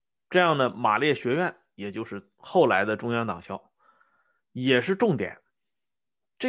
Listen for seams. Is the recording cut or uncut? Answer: uncut